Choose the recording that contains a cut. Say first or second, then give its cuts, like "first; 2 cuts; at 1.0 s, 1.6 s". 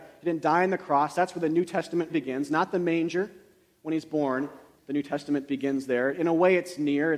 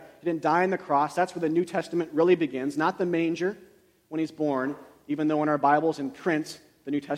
first; 2 cuts; at 2.1 s, 4.8 s